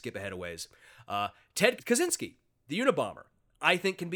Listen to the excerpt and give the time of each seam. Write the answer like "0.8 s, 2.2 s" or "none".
1.8 s